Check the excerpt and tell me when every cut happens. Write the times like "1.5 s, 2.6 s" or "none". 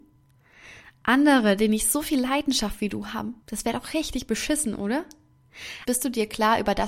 3.4 s, 5.9 s